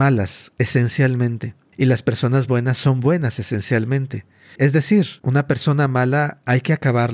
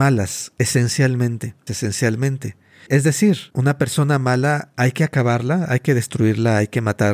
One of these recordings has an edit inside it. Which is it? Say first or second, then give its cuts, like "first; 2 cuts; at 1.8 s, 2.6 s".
second; 1 cut; at 1.7 s